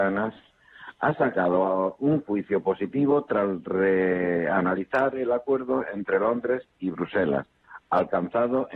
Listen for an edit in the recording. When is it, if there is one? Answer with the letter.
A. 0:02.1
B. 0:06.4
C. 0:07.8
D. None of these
D